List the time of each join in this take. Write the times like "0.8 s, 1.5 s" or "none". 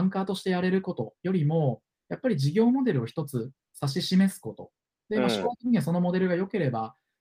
none